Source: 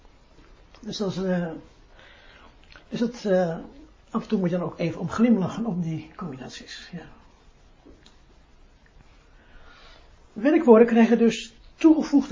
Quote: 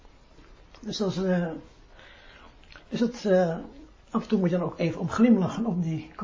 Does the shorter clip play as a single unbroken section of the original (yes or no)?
yes